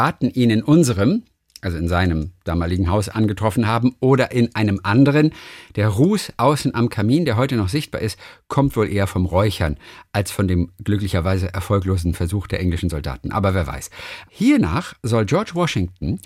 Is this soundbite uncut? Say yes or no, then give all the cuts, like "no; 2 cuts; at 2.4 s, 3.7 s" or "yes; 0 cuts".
no; 1 cut; at 14.3 s